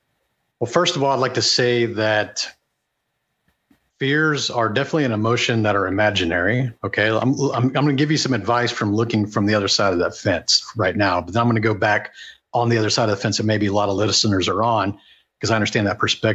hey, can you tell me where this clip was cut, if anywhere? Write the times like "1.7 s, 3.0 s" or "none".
none